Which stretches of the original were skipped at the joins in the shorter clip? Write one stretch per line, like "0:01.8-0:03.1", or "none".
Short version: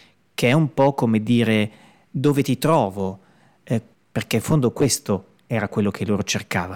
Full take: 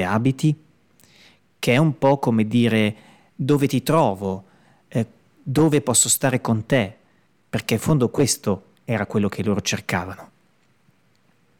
0:05.2-0:07.3